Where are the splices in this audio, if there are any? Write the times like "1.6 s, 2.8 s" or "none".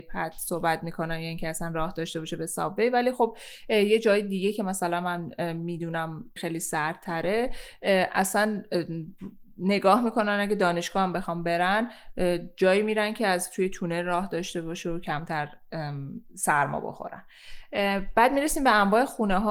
6.4 s